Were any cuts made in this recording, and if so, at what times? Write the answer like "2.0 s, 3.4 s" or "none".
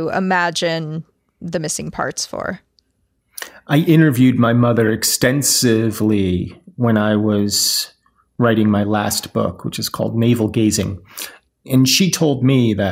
11.5 s

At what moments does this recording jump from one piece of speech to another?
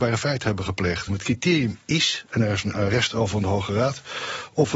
1.1 s

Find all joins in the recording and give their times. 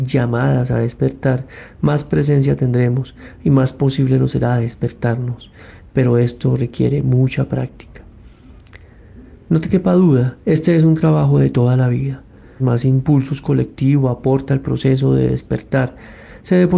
10.4 s, 12.6 s

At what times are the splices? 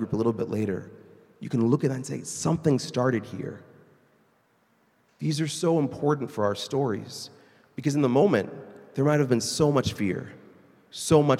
none

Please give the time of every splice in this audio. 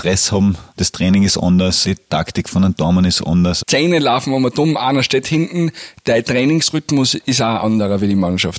1.8 s, 3.6 s

